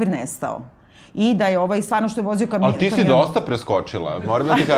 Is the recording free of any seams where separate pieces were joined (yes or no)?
yes